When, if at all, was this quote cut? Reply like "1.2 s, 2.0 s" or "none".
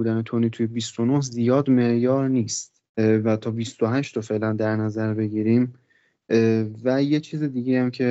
2.9 s